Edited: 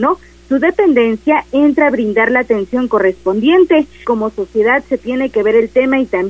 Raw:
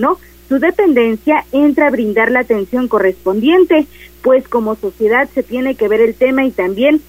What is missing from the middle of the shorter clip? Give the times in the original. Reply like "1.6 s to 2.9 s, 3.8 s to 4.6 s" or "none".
4.0 s to 4.5 s